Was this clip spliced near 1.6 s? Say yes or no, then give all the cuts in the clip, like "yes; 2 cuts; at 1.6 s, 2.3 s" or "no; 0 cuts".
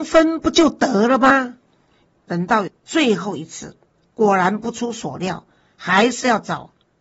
no; 2 cuts; at 4.0 s, 5.6 s